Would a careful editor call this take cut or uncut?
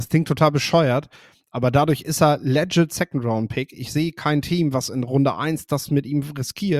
uncut